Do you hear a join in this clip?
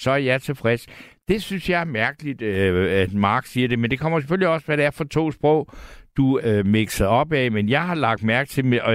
yes; 1 cut; at 6.4 s

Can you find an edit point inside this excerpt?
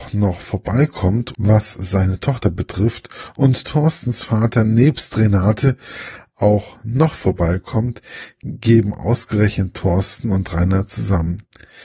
yes; 1 cut; at 1.3 s

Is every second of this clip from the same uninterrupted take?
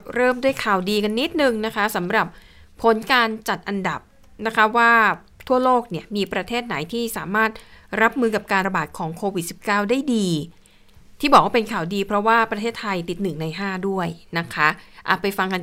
no; 1 cut; at 8.6 s

